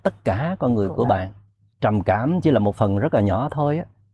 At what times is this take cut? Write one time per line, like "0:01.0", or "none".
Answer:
0:01.7